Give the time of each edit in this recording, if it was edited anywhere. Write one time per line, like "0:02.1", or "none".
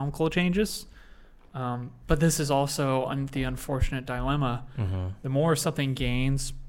none